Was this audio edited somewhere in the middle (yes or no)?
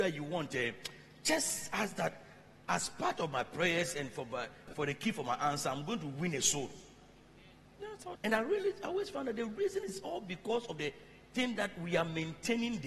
yes